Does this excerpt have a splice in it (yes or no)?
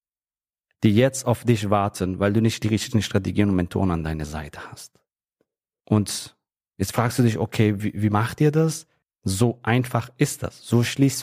yes